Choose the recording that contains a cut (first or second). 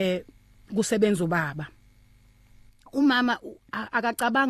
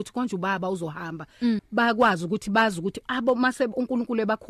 second